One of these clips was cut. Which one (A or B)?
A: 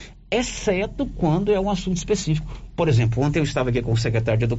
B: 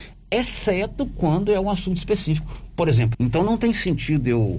B